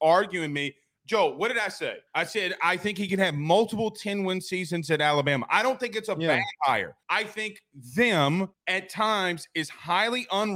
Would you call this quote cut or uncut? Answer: cut